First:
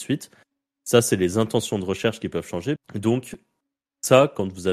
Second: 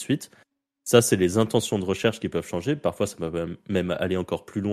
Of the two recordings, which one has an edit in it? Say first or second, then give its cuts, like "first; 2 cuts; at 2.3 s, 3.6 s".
first; 1 cut; at 2.8 s